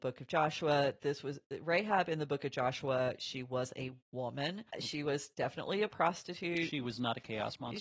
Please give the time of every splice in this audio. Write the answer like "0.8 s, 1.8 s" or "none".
4.7 s